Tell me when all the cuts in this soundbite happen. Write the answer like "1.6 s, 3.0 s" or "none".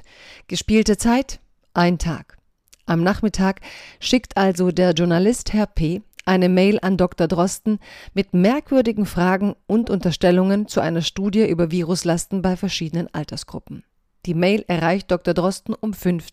none